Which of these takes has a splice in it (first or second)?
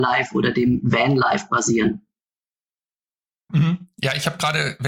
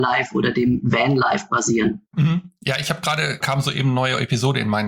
second